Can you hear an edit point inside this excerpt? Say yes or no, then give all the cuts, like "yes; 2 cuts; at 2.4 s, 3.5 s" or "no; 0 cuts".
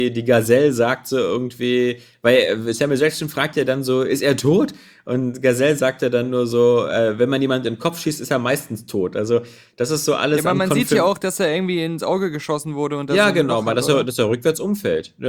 no; 0 cuts